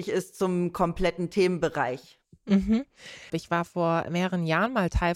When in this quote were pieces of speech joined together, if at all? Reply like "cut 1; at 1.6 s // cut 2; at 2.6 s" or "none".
cut 1; at 3.3 s